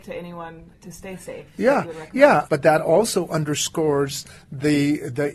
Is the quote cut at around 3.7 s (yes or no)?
no